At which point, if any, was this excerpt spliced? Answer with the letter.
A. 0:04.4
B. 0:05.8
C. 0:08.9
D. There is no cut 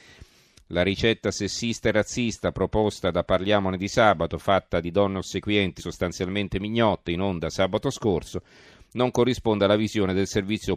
B